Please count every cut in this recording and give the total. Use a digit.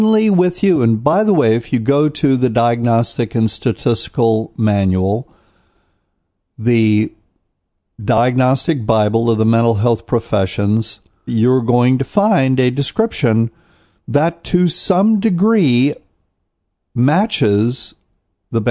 1